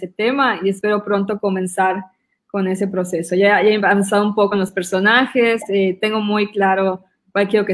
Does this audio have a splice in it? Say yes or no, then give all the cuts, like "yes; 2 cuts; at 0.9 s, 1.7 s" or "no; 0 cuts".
no; 0 cuts